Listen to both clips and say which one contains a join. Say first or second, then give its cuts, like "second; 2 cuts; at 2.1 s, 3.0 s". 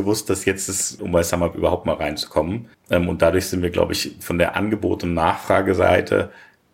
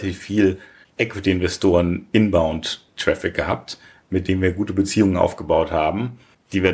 first; 2 cuts; at 1.0 s, 2.7 s